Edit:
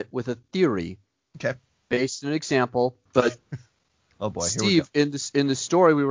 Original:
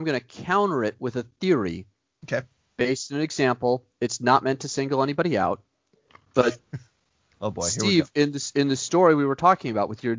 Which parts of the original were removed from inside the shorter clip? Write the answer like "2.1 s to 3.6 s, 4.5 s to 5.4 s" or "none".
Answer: 3.9 s to 6.3 s